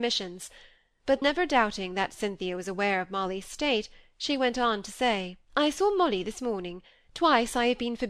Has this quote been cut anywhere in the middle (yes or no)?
yes